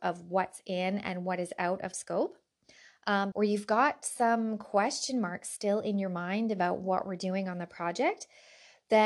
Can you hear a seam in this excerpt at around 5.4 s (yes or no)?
no